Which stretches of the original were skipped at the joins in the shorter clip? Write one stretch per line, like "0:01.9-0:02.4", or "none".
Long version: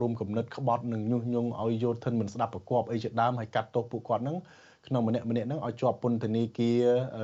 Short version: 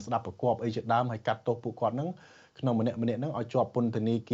none